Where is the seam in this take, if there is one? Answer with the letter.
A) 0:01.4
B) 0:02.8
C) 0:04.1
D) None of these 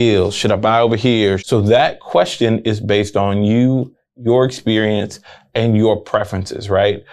A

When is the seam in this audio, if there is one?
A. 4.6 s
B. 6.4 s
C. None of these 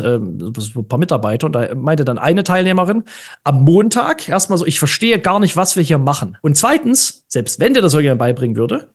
B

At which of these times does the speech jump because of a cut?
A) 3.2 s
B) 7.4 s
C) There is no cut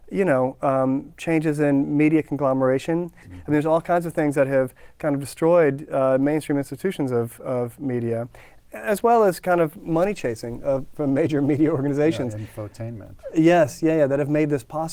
A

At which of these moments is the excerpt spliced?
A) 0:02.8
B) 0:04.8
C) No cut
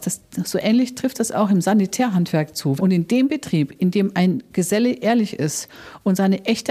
A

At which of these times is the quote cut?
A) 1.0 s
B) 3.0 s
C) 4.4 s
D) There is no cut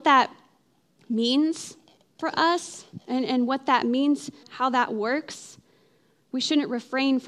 C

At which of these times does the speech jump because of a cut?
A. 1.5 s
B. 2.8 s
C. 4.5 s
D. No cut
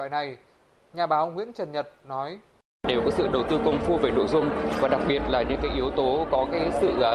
D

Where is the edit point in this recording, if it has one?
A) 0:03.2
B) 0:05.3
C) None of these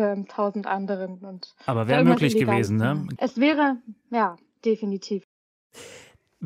A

